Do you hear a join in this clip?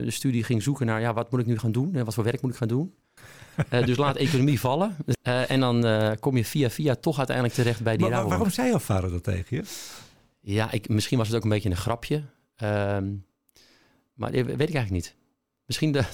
yes; 2 cuts; at 3.2 s, 5.1 s

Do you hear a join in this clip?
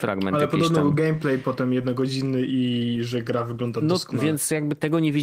no; 0 cuts

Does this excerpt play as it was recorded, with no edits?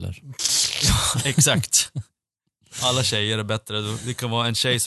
yes; 0 cuts

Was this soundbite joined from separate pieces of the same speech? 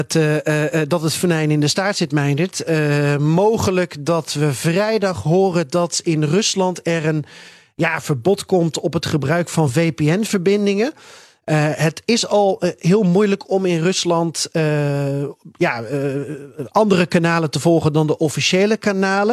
no; 0 cuts

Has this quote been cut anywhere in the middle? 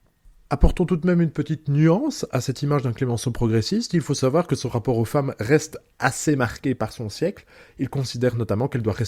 no; 0 cuts

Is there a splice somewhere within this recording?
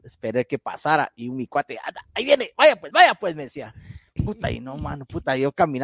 yes; 1 cut; at 2.9 s

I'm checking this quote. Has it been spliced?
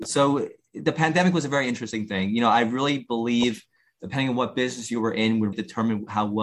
yes; 1 cut; at 5.5 s

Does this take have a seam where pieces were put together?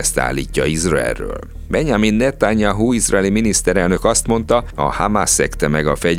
no; 0 cuts

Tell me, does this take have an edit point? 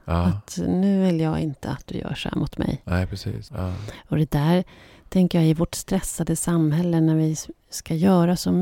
yes; 1 cut; at 3.5 s

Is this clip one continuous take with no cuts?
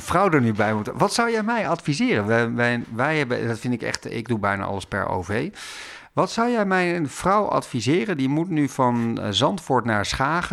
yes; 0 cuts

